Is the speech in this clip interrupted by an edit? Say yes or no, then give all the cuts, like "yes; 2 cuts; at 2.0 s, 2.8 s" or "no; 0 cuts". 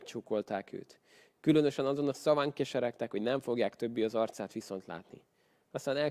no; 0 cuts